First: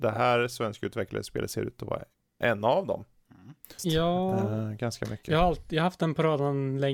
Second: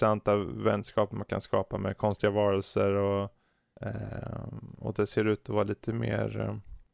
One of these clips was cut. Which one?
first; 1 cut; at 3.8 s

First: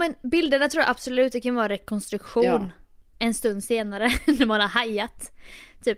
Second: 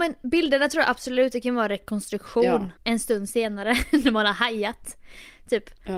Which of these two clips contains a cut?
second; 1 cut; at 2.8 s

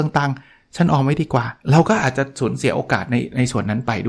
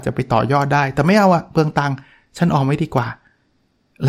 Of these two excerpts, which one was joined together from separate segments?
first; 1 cut; at 1.6 s

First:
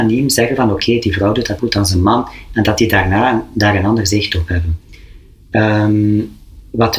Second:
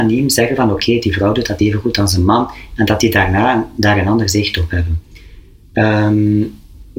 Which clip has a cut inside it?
first; 1 cut; at 1.6 s

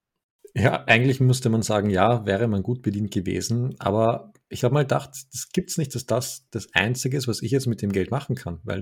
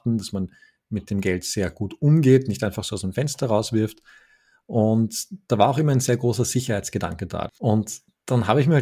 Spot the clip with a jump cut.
second; 1 cut; at 7.5 s

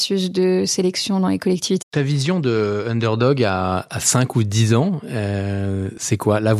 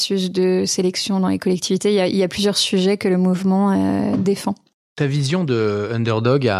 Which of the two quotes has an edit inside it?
first; 2 cuts; at 1.8 s, 3.9 s

